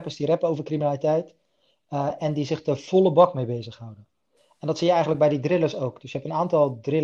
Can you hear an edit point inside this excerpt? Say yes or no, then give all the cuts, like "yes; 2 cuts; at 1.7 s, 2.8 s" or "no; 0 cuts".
no; 0 cuts